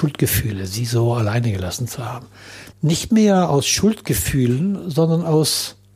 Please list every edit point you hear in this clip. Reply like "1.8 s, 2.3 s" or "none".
2.7 s